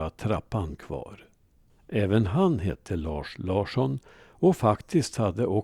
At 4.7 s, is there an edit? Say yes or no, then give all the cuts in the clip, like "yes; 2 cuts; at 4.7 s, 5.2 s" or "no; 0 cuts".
no; 1 cut; at 1.7 s